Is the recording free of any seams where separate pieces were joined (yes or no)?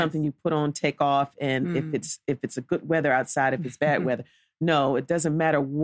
yes